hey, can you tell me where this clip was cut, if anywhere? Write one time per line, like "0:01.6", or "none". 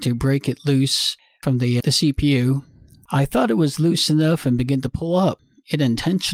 0:01.8

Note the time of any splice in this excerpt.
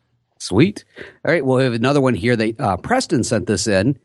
none

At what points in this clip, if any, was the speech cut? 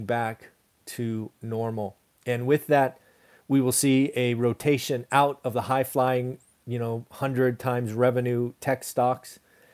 none

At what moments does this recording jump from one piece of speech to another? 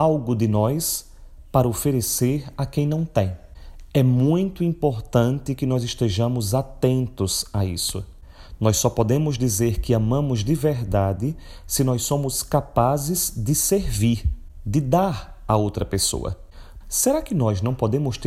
0:16.8

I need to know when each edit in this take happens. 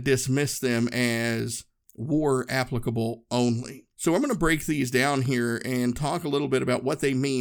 0:03.9

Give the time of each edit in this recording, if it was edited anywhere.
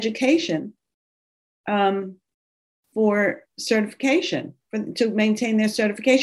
none

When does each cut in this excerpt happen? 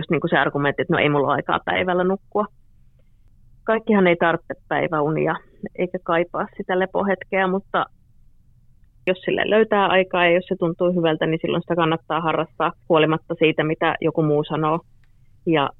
0:05.7
0:12.8

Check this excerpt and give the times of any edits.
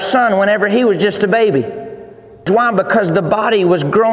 0:02.5

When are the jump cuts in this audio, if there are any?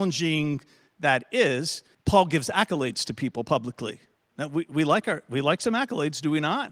0:01.9

